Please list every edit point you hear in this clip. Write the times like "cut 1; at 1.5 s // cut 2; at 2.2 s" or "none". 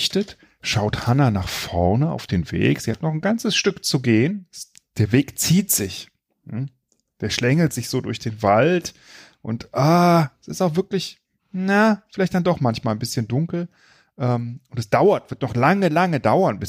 none